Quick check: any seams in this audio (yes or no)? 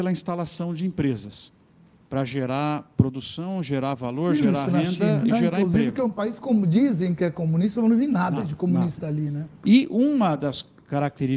no